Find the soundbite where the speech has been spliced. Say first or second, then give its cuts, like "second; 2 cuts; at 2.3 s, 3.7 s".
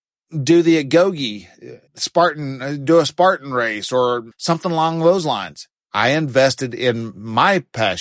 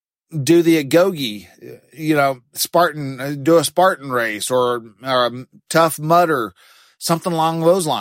first; 3 cuts; at 1.9 s, 4.3 s, 5.8 s